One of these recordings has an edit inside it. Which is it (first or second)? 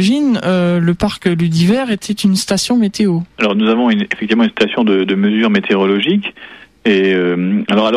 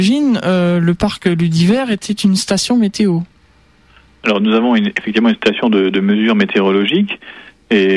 first